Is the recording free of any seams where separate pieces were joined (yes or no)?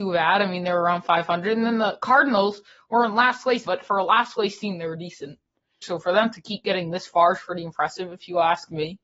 no